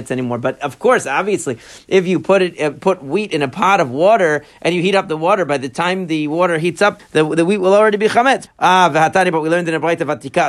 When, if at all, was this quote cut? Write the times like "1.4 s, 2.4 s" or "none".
7.0 s, 8.5 s